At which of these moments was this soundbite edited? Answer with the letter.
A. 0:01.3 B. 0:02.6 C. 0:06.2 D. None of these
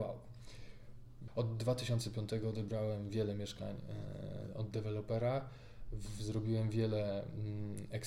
A